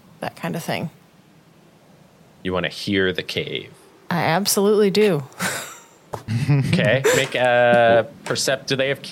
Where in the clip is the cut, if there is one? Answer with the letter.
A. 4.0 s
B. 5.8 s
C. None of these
C